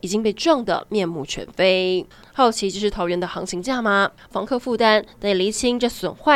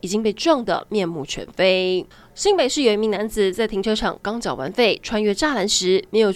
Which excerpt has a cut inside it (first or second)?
first